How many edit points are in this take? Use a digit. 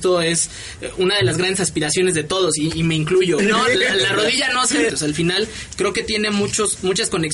2